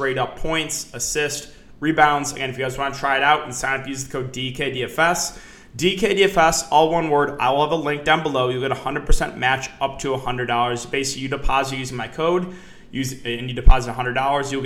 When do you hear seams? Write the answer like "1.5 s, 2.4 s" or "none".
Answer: none